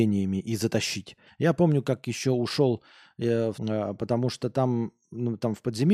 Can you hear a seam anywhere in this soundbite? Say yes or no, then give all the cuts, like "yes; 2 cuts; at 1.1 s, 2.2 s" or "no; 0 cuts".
yes; 2 cuts; at 1.3 s, 3.5 s